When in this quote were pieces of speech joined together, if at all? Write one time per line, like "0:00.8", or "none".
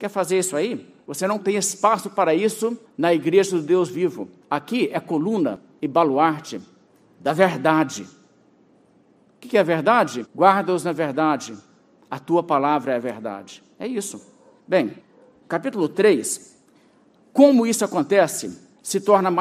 0:10.2